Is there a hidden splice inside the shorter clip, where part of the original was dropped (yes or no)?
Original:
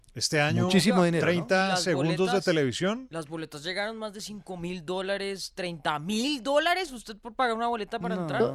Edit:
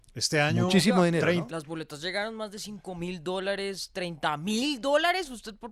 yes